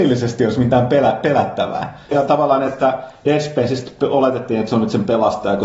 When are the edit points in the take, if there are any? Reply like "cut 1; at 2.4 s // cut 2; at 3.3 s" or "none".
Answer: cut 1; at 2.1 s